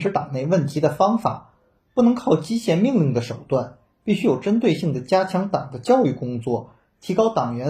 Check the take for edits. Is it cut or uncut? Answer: uncut